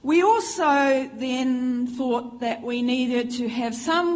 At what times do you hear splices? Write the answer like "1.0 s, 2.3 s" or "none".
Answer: none